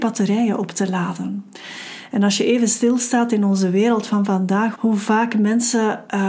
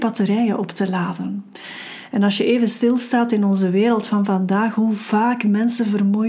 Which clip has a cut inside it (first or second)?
first